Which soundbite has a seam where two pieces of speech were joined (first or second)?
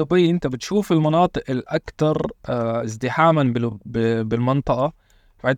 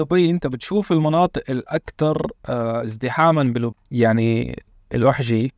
second